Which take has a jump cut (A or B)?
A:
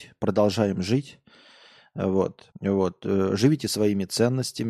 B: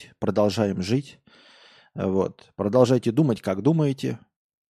A